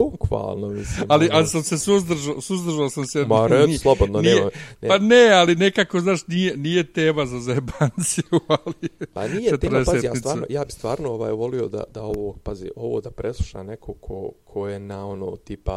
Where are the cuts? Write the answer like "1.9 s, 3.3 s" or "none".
none